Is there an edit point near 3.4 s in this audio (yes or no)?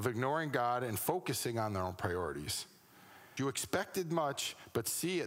yes